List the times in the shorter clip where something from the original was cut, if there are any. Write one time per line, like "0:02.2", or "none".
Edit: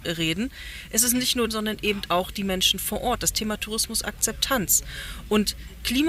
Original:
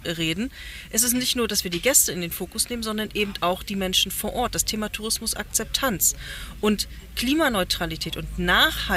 0:01.5